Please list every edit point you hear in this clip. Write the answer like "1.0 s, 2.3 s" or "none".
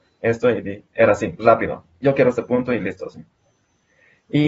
none